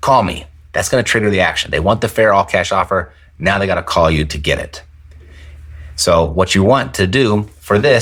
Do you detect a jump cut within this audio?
no; 0 cuts

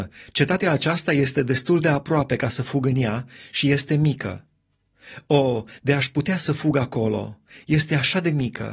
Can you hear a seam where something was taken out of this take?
no; 0 cuts

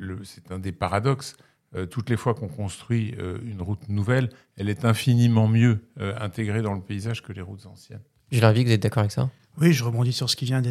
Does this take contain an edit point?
no; 0 cuts

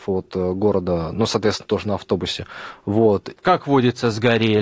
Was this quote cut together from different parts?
yes; 1 cut; at 3.3 s

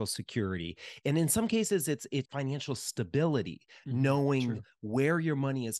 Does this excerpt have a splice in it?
yes; 1 cut; at 2.2 s

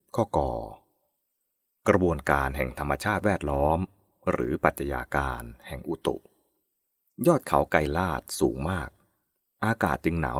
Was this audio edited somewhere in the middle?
no; 0 cuts

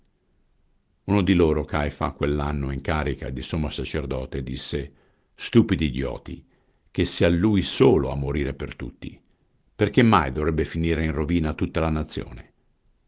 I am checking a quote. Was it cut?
no; 0 cuts

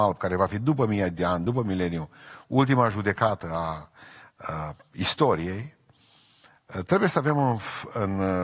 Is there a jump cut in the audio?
no; 0 cuts

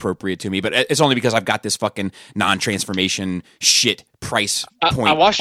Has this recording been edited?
no; 0 cuts

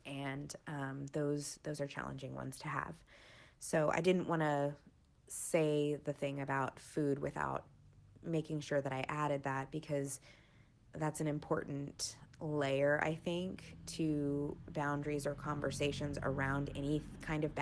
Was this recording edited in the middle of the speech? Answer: no; 0 cuts

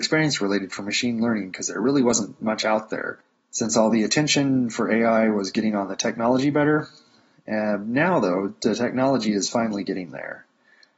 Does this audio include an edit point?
no; 0 cuts

